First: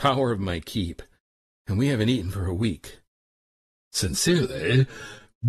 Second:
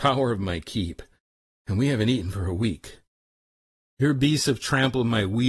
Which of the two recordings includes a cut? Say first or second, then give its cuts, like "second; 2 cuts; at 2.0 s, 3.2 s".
first; 1 cut; at 3.7 s